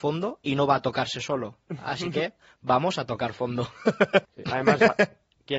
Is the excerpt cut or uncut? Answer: cut